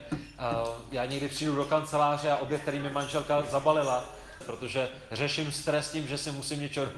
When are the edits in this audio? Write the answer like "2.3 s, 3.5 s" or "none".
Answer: 4.4 s